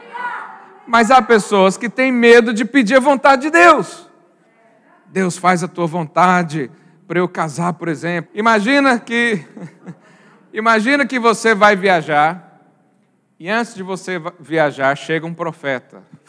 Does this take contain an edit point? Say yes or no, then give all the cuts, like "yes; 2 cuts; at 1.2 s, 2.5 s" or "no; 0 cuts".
yes; 1 cut; at 8.3 s